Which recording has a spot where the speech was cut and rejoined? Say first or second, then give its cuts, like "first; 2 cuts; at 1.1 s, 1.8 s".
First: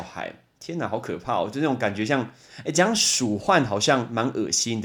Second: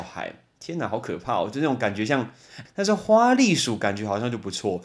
second; 1 cut; at 2.7 s